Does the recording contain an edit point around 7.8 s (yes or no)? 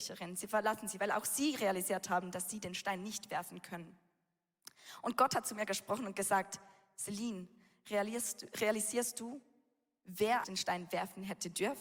no